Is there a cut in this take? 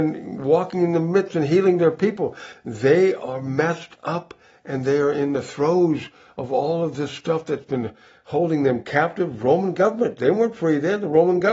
no; 0 cuts

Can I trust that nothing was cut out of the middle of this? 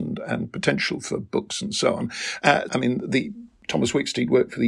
no; 1 cut; at 2.7 s

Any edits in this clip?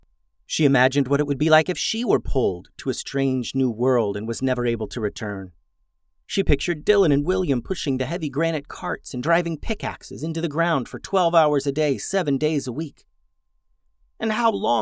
no; 0 cuts

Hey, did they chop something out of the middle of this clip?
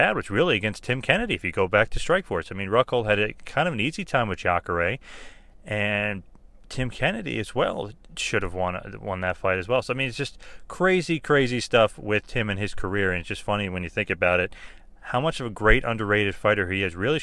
no; 0 cuts

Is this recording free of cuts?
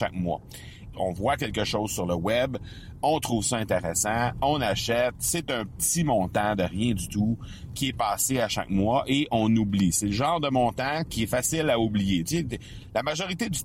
no; 1 cut; at 0.9 s

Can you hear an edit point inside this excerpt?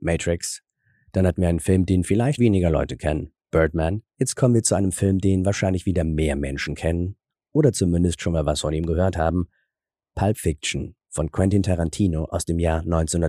yes; 2 cuts; at 2.4 s, 4.1 s

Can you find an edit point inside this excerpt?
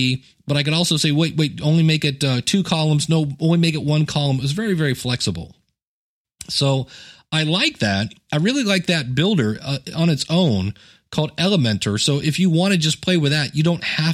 no; 0 cuts

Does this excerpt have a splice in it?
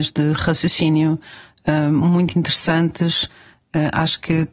no; 0 cuts

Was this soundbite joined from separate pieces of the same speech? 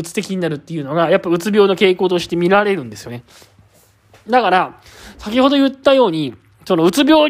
no; 0 cuts

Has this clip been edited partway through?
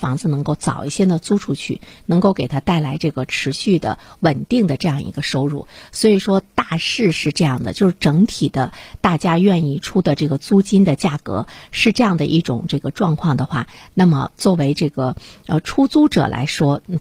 no; 0 cuts

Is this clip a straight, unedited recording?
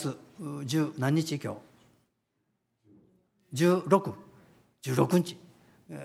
yes; 0 cuts

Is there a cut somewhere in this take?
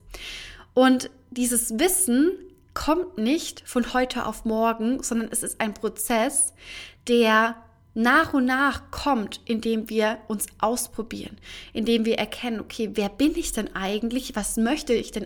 no; 0 cuts

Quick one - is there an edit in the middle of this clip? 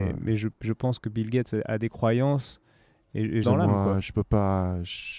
yes; 1 cut; at 3.4 s

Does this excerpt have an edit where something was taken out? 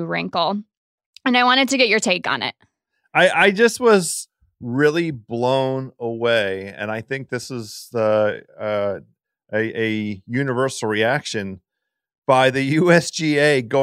no; 0 cuts

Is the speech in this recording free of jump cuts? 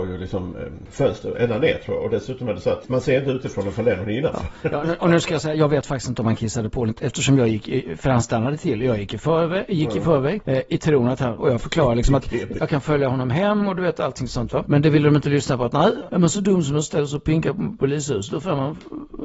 no; 2 cuts; at 11.4 s, 12.6 s

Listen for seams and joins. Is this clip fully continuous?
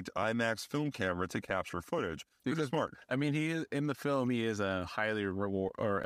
yes; 0 cuts

